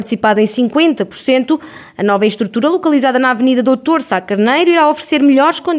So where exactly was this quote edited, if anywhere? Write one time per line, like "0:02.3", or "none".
none